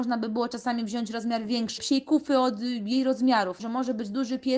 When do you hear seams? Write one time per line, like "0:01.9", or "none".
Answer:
0:01.8
0:03.6